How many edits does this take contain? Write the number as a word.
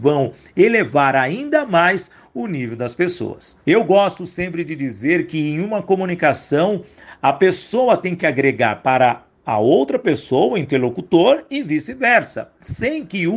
one